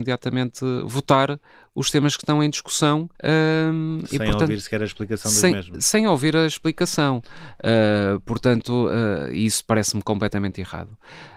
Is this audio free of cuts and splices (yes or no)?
no